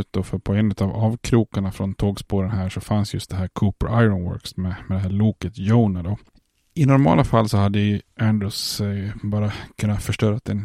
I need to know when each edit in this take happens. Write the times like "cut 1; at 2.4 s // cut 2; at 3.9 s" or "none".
none